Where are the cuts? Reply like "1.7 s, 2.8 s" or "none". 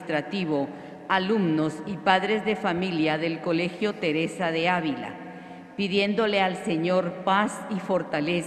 none